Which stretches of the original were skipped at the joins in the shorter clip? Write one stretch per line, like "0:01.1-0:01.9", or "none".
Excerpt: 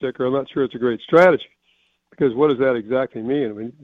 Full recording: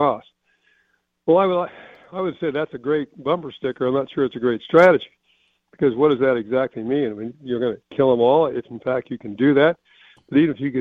none